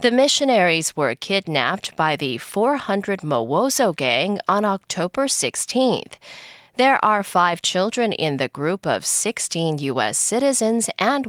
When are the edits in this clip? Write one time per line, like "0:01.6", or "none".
none